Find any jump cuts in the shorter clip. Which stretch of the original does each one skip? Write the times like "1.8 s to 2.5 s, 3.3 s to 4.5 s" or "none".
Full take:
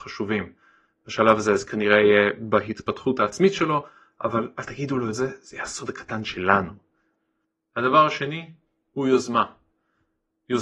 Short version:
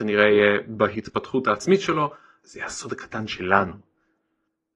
4.2 s to 5.4 s